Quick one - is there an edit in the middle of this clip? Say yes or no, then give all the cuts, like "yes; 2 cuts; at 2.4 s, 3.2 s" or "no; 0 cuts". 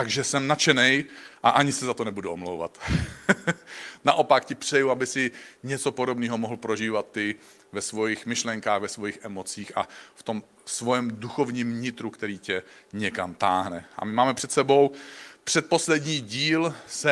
no; 0 cuts